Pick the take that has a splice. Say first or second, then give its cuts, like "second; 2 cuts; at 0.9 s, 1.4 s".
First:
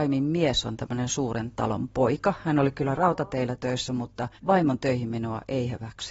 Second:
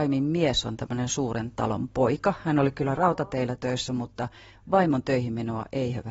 first; 1 cut; at 4.4 s